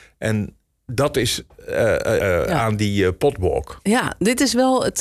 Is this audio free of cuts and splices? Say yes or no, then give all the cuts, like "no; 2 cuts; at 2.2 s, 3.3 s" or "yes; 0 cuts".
no; 1 cut; at 2.2 s